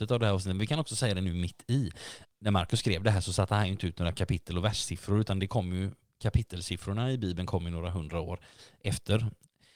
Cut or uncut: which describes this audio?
cut